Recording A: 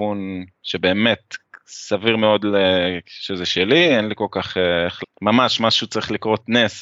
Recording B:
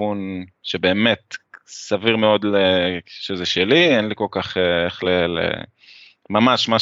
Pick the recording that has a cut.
A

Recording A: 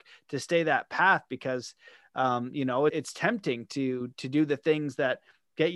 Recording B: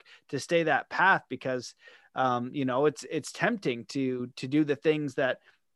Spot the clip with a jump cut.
A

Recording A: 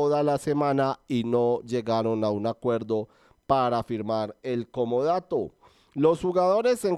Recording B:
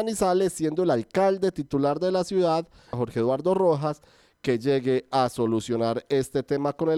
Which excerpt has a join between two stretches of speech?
B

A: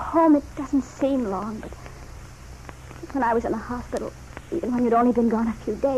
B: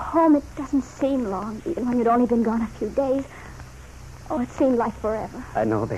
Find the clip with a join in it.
B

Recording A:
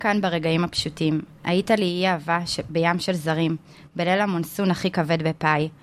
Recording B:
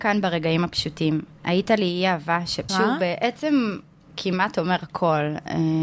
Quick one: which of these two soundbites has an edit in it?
B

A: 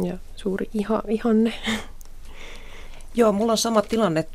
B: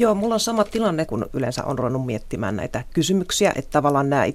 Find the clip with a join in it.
B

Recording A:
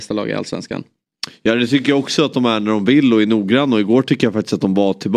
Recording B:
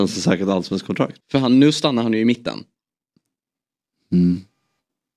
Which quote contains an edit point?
B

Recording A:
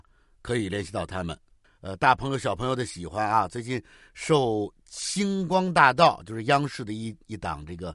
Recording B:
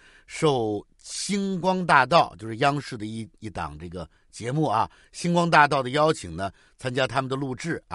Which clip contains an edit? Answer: A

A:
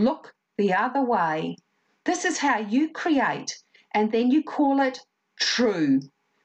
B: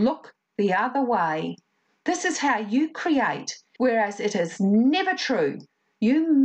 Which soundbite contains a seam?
B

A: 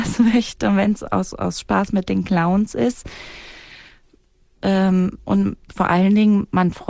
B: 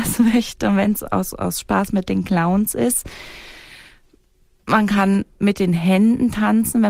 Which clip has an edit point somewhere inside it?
A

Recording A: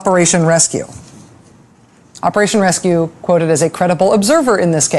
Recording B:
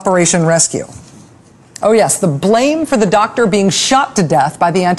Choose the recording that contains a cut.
B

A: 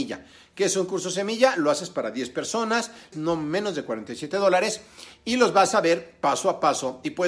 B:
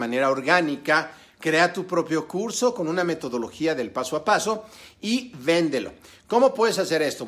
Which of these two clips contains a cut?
A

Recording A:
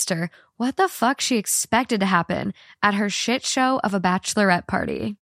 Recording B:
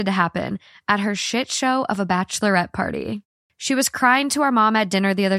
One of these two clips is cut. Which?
B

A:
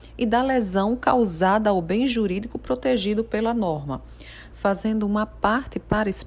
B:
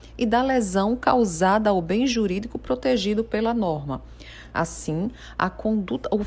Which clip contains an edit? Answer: A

